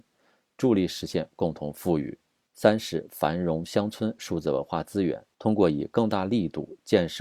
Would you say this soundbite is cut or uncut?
uncut